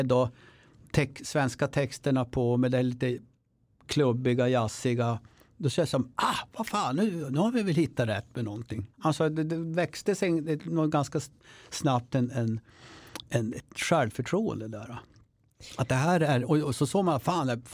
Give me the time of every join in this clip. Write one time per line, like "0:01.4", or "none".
0:08.9